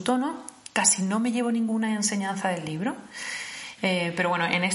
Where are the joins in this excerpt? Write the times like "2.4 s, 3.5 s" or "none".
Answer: 3.8 s